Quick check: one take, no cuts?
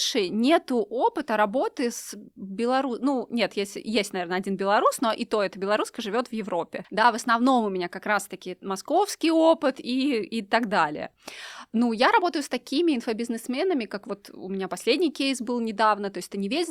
yes; 0 cuts

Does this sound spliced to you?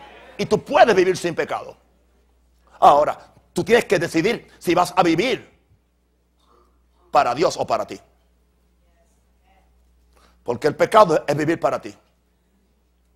no; 0 cuts

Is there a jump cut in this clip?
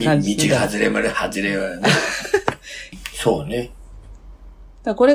yes; 1 cut; at 2.9 s

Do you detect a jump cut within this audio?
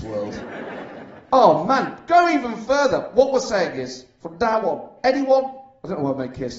no; 0 cuts

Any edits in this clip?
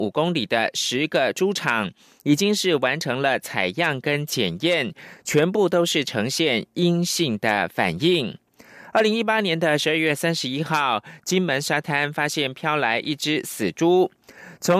no; 0 cuts

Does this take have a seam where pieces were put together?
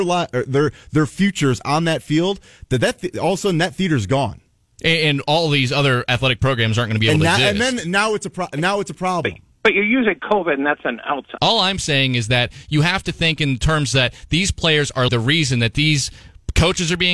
yes; 2 cuts; at 11.4 s, 15.1 s

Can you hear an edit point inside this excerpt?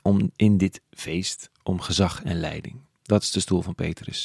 no; 0 cuts

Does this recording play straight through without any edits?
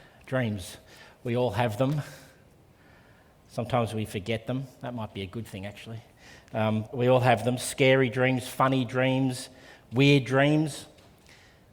no; 1 cut; at 6.9 s

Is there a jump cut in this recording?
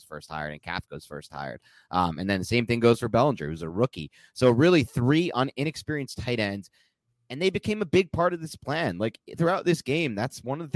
no; 0 cuts

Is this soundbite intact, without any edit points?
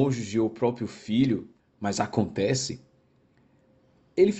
no; 1 cut; at 1.6 s

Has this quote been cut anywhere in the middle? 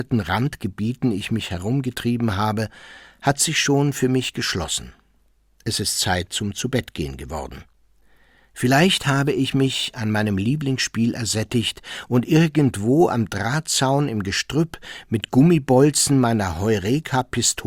no; 0 cuts

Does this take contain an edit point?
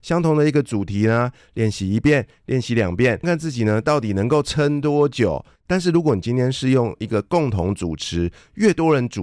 yes; 2 cuts; at 3.2 s, 5.6 s

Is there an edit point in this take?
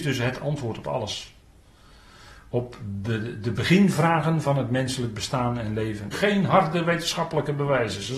yes; 1 cut; at 6.1 s

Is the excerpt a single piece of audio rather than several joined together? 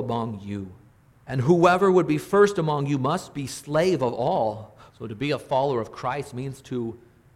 no; 2 cuts; at 1.2 s, 4.9 s

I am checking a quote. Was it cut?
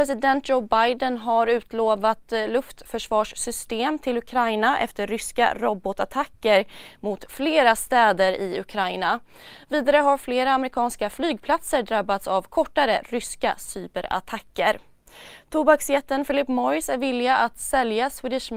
no; 0 cuts

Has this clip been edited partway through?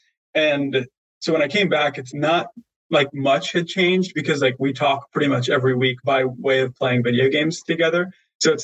yes; 2 cuts; at 2.1 s, 6.0 s

